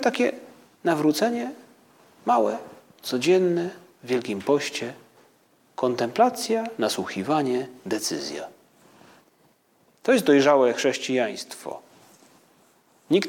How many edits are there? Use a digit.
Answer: 0